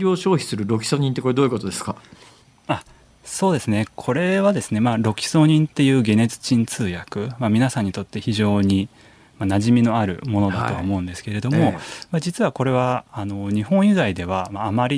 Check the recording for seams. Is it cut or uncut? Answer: uncut